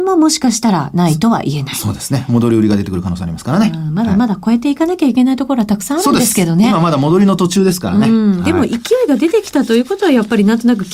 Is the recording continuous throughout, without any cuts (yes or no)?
yes